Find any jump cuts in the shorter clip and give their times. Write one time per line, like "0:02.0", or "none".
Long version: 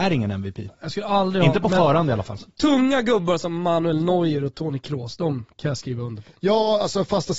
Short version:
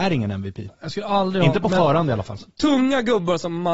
none